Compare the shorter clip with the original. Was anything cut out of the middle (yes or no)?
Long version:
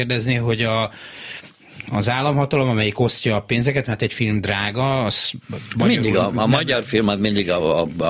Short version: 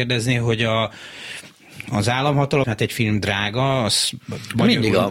yes